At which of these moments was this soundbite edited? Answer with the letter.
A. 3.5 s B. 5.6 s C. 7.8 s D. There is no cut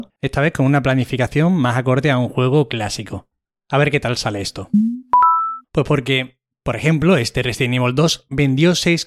B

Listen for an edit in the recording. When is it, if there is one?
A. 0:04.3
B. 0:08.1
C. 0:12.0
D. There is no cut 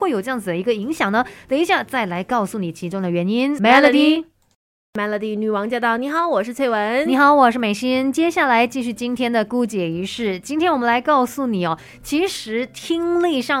D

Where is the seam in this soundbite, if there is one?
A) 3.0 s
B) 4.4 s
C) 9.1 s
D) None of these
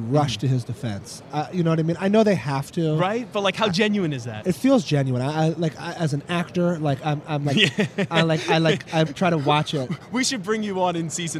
C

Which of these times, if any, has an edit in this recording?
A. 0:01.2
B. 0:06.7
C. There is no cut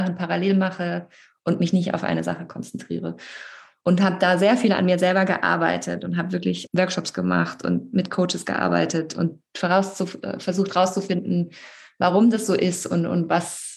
B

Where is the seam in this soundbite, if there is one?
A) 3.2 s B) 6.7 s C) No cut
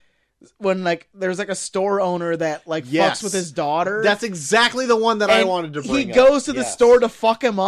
C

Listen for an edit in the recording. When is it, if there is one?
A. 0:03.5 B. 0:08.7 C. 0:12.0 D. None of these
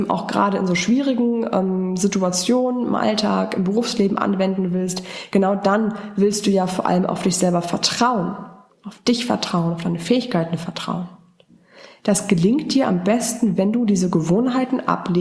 B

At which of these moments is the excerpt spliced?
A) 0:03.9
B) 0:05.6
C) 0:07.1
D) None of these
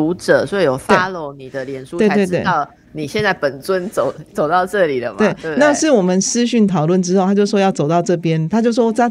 D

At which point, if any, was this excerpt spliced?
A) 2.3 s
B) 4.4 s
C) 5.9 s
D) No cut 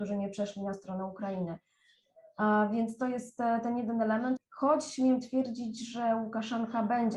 B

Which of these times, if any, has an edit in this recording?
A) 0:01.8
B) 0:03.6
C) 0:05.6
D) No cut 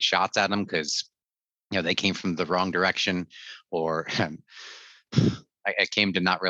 D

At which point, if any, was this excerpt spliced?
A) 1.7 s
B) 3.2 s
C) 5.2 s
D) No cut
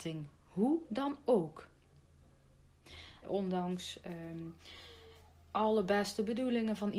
B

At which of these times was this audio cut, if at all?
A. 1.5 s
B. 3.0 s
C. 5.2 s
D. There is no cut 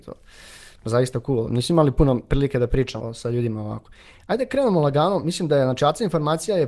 B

